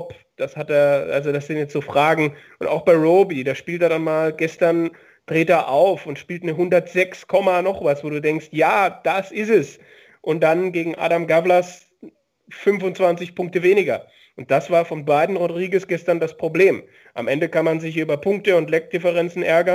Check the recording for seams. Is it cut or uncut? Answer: uncut